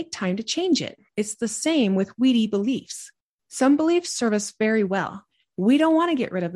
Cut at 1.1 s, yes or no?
yes